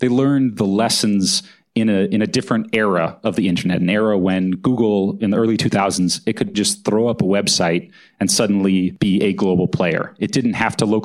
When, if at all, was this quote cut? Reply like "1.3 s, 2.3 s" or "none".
6.5 s